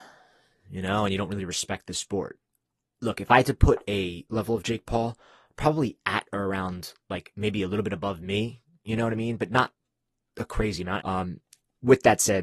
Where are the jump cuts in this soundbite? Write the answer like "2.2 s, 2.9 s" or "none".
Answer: 4.3 s, 11.0 s